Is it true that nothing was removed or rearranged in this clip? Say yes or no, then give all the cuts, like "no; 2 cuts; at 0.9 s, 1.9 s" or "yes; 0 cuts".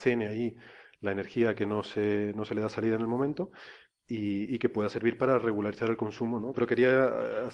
no; 1 cut; at 6.5 s